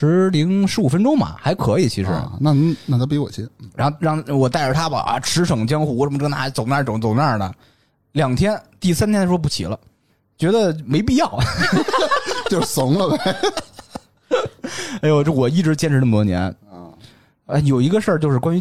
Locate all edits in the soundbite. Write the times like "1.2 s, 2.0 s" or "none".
none